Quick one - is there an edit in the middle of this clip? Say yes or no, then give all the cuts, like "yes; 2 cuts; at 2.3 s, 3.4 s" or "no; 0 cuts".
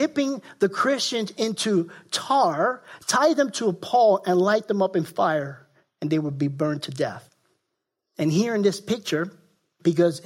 no; 0 cuts